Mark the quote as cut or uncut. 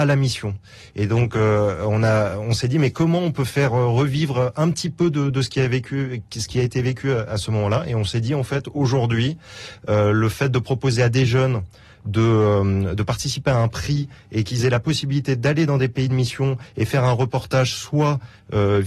uncut